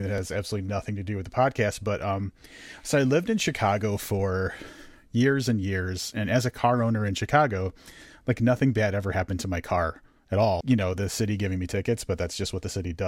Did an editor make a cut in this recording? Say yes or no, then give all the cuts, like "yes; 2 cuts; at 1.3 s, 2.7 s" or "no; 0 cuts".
yes; 1 cut; at 10.6 s